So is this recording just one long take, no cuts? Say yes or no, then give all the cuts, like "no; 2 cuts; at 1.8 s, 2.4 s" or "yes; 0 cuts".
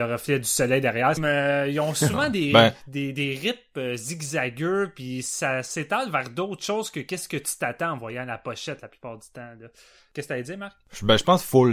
no; 1 cut; at 1.2 s